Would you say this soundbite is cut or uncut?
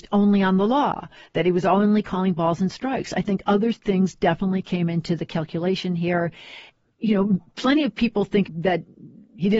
uncut